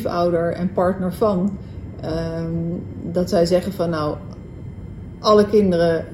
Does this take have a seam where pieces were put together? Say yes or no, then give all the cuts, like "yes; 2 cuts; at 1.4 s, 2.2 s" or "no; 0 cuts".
no; 0 cuts